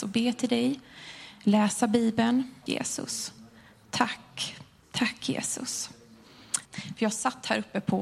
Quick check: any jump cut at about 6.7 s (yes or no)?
yes